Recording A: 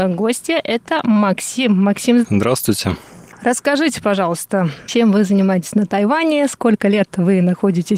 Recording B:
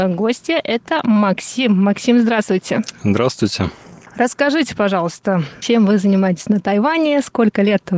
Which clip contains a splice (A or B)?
A